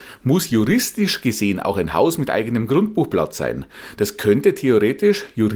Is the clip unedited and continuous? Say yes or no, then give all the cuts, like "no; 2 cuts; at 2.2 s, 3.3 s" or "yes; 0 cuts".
yes; 0 cuts